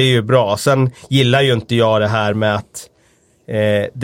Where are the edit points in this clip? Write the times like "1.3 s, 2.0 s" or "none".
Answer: none